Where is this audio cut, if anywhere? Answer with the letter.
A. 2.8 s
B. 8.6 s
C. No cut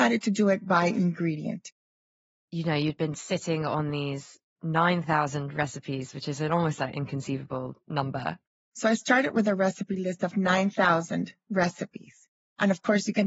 B